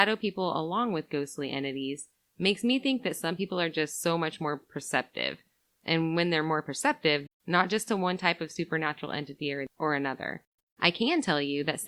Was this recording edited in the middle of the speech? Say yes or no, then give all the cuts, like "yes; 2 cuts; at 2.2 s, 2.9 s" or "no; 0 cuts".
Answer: yes; 2 cuts; at 7.3 s, 10.6 s